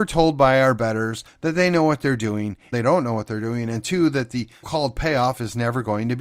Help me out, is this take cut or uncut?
cut